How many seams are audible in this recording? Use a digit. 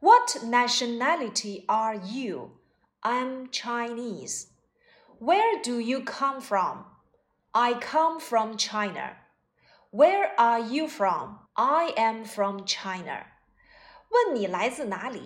1